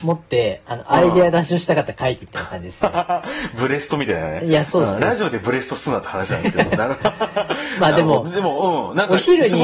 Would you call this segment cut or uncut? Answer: uncut